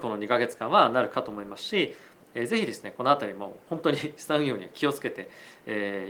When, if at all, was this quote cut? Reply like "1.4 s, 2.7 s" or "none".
2.2 s